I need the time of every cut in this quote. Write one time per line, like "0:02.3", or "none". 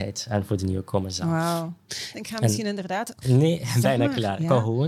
0:02.1
0:03.2